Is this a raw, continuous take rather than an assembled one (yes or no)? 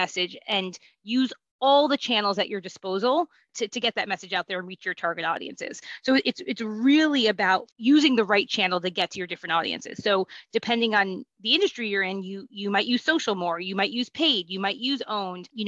yes